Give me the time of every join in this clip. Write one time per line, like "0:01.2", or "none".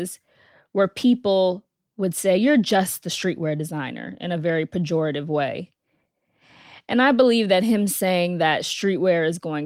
none

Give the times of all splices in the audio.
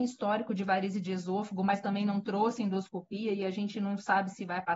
none

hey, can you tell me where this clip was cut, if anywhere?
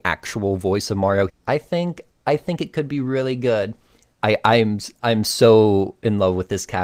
0:01.3
0:04.1

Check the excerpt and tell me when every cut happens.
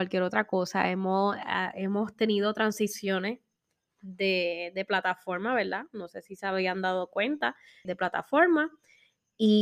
0:07.8

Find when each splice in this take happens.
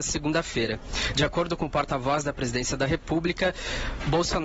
none

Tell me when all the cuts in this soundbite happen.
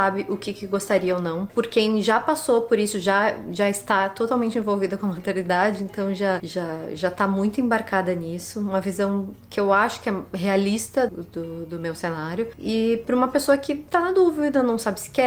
0:11.1

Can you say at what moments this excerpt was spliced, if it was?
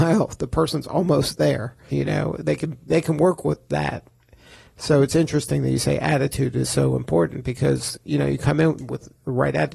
0:01.9

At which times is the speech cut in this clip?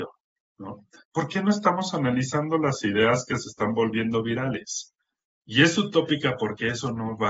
0:01.0
0:03.3
0:05.2

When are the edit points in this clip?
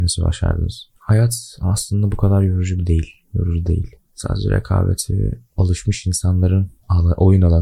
0:00.9

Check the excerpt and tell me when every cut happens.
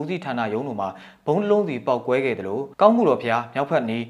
0:02.7

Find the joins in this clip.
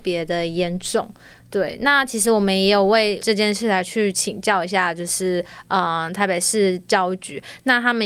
none

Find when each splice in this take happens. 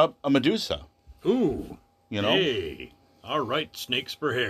0:01.2

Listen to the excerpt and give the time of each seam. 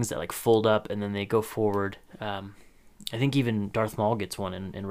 none

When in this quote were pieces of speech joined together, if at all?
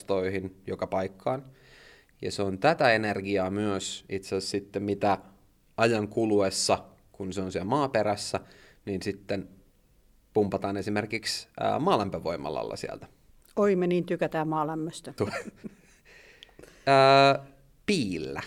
0:15.2

